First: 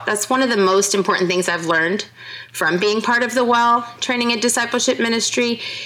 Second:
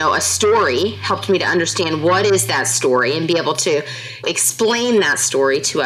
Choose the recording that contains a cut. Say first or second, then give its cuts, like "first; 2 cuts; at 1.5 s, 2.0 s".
second; 1 cut; at 4.2 s